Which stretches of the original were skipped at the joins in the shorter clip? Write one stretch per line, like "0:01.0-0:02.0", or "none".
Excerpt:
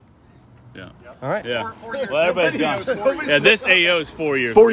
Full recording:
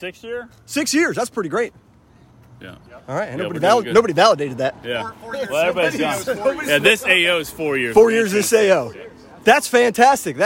0:03.3-0:04.8